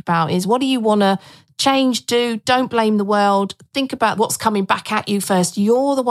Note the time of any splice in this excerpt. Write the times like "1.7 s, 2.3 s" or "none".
none